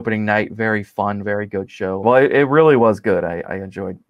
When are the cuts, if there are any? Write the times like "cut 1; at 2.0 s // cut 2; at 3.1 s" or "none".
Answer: cut 1; at 2.0 s